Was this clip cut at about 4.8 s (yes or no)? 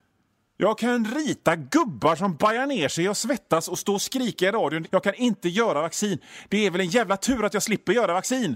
yes